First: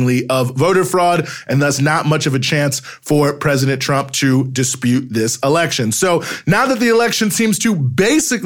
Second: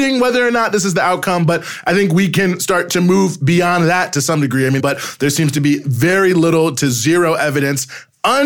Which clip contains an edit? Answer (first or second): second